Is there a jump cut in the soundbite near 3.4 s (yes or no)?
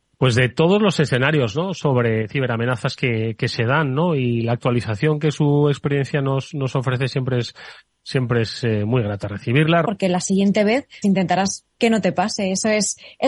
no